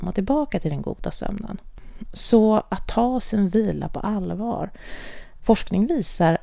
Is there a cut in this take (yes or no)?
yes